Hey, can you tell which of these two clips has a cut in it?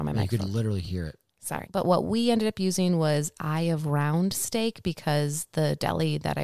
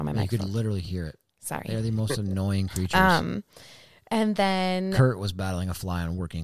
first; 1 cut; at 1.6 s

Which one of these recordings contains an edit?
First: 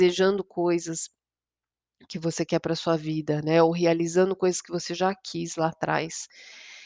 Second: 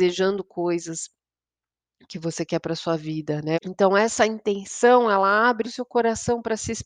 second; 2 cuts; at 3.5 s, 5.6 s

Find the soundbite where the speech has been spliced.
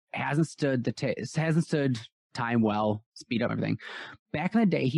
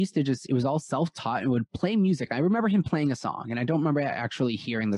first; 1 cut; at 3.5 s

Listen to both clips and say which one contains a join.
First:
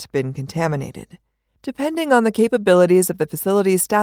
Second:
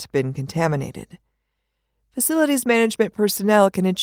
first; 1 cut; at 1.5 s

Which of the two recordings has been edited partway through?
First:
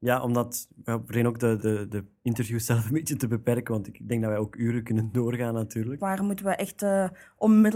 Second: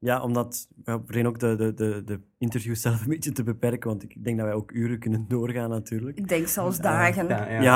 first; 2 cuts; at 1.6 s, 6.0 s

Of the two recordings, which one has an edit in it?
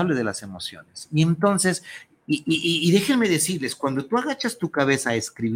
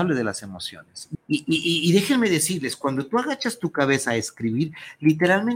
second; 1 cut; at 1.1 s

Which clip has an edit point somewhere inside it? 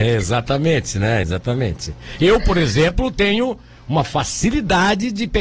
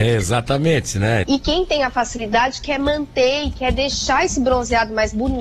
second; 1 cut; at 1.2 s

